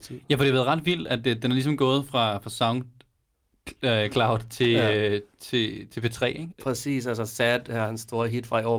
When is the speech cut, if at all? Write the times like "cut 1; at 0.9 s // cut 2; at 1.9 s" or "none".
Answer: cut 1; at 6.5 s